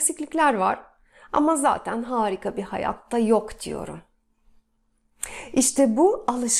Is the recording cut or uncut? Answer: uncut